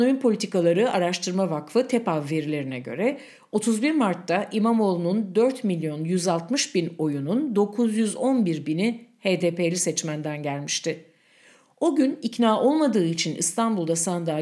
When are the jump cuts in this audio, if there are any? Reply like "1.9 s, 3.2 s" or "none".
none